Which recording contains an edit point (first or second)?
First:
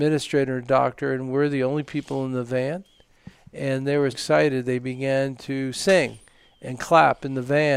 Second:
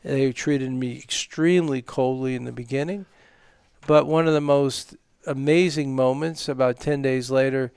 first